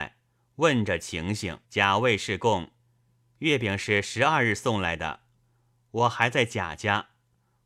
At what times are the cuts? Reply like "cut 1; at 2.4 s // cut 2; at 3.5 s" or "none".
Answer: cut 1; at 1.6 s